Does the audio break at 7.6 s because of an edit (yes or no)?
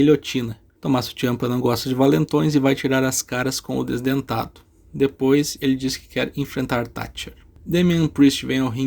no